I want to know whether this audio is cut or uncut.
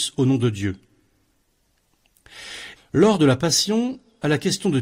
cut